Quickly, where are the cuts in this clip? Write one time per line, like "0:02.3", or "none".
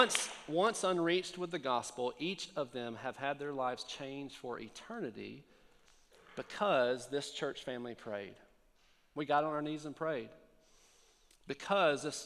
none